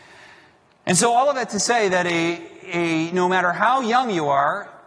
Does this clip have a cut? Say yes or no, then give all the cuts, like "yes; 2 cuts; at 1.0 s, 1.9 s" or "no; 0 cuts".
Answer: no; 0 cuts